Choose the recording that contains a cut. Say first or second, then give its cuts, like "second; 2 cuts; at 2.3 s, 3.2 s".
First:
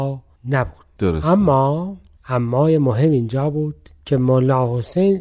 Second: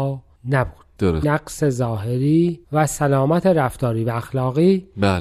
second; 2 cuts; at 1.2 s, 2.6 s